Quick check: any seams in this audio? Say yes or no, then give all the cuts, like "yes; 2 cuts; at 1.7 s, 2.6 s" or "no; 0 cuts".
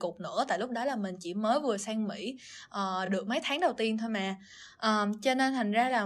no; 0 cuts